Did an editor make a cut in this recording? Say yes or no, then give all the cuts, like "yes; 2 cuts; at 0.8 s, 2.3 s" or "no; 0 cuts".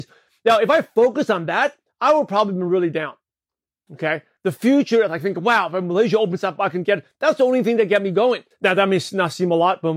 yes; 2 cuts; at 4.4 s, 8.5 s